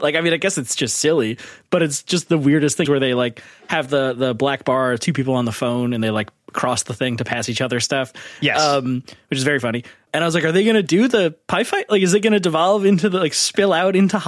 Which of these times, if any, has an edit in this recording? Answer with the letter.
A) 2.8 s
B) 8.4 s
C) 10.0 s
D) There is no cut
A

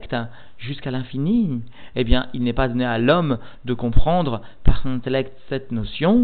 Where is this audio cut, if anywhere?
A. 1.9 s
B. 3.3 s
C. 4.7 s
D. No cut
A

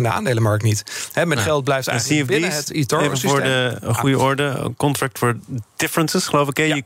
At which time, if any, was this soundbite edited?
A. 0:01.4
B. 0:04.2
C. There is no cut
A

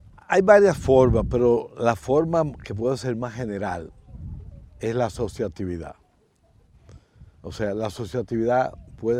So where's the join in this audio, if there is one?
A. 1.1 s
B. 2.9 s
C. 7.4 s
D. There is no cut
C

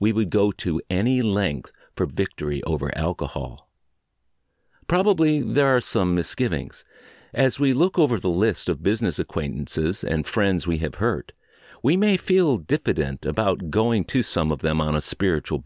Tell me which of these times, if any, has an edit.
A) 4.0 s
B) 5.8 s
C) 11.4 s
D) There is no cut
B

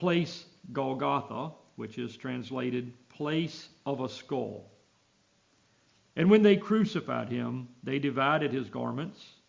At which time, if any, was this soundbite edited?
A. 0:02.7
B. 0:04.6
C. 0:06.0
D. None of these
C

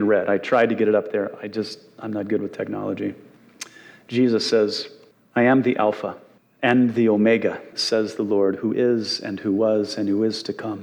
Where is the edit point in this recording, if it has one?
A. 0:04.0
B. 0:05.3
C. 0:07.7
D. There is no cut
C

